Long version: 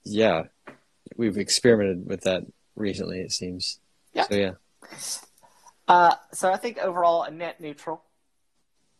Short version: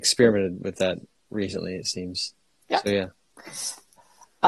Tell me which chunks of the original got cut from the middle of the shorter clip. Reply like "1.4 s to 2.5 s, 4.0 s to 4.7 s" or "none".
none